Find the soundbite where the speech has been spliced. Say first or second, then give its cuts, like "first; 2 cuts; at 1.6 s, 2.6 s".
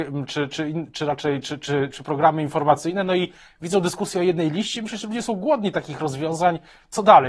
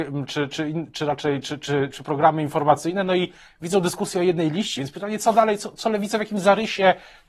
second; 1 cut; at 4.8 s